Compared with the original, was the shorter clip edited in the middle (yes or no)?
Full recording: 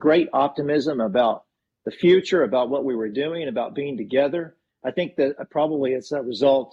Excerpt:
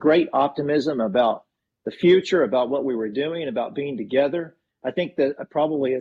no